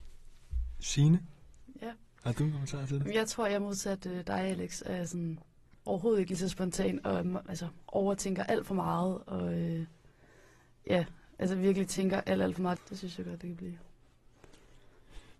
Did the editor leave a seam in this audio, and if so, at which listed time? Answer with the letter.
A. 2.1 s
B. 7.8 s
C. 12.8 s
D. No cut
C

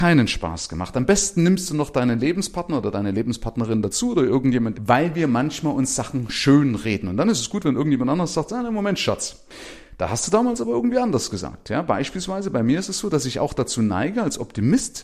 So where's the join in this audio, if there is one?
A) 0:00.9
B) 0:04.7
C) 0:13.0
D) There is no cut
B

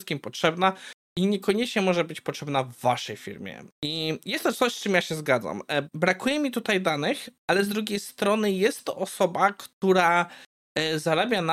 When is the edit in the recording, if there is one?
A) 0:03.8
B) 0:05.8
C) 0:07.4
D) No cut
B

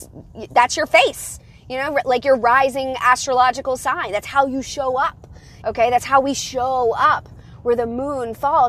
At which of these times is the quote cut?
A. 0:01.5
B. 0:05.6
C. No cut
B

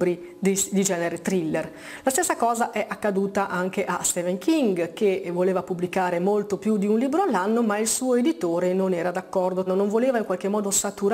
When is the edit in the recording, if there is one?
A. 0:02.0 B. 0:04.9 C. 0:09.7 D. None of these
C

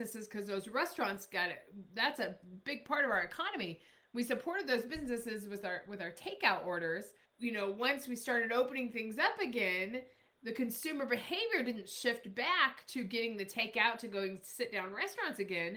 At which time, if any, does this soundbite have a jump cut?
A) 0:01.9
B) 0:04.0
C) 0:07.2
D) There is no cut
C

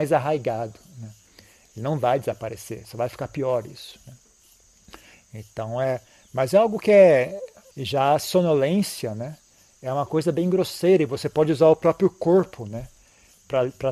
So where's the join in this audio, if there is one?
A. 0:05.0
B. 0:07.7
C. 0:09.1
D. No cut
B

